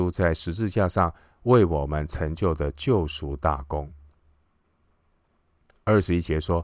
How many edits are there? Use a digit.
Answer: 0